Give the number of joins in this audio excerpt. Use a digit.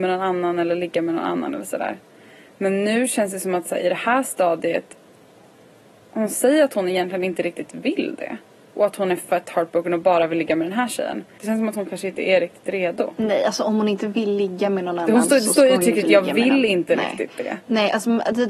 1